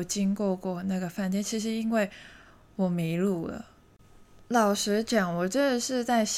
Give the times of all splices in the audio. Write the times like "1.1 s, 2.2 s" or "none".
none

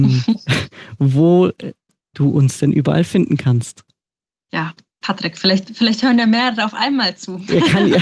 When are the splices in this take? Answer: none

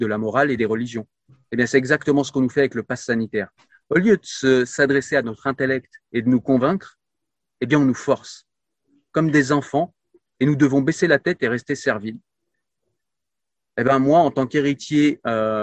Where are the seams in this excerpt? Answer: none

